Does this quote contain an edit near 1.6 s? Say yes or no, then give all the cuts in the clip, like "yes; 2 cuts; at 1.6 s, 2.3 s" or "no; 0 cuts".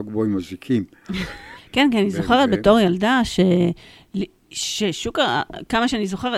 yes; 1 cut; at 1.6 s